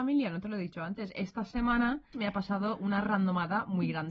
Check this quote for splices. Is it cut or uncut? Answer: cut